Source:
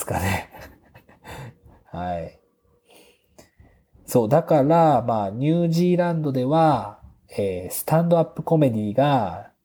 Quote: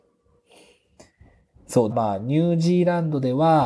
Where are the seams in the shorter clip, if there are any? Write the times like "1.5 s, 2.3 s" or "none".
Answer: 1.9 s